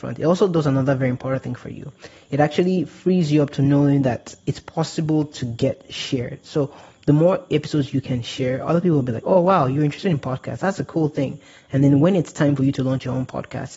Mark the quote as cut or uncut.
uncut